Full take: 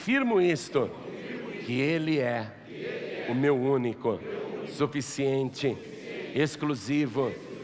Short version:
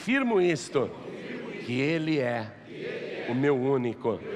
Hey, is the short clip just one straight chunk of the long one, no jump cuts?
yes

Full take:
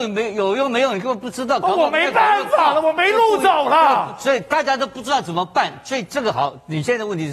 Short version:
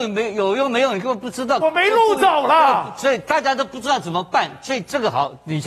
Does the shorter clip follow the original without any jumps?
no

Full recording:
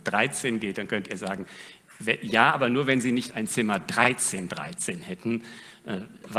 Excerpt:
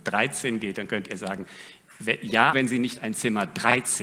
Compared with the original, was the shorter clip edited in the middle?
yes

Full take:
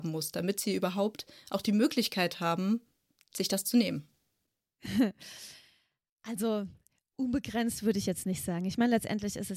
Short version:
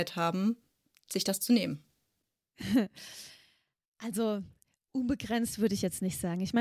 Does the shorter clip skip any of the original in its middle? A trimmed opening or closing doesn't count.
no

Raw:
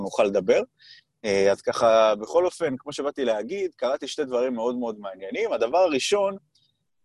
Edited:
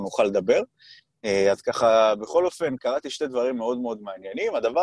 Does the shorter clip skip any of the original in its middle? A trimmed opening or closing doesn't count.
yes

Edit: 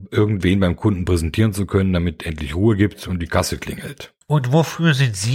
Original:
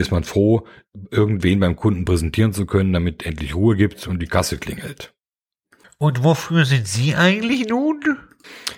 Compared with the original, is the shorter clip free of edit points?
no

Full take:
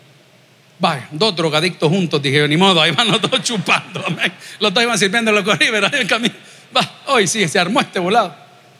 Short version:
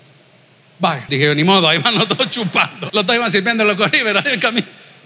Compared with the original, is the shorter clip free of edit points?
no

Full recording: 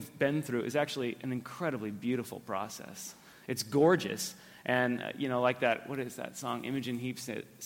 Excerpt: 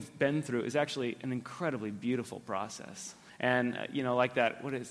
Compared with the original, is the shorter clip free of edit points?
no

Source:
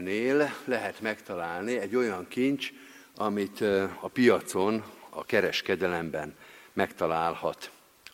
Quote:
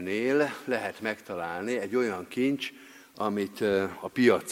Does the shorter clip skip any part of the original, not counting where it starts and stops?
no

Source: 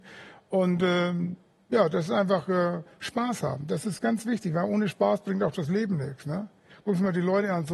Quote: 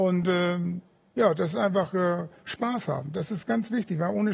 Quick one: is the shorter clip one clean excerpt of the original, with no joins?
yes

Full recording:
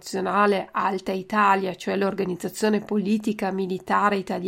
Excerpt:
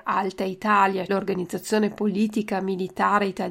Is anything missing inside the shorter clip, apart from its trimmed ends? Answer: yes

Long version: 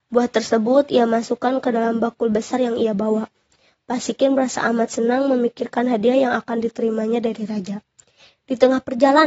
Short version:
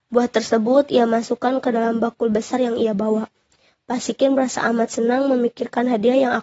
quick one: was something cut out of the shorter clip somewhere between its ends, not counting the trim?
no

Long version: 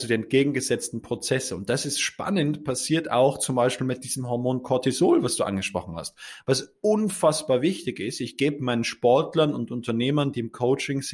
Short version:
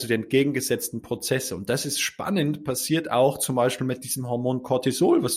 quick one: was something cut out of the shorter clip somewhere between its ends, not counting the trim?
no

